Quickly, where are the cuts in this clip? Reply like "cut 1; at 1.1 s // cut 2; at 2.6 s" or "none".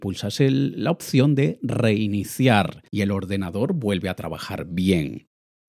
cut 1; at 2.9 s